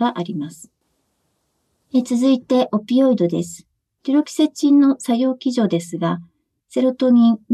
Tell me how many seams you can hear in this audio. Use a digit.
1